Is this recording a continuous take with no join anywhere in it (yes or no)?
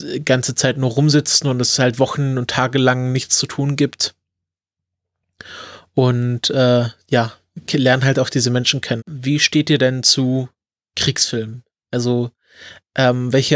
no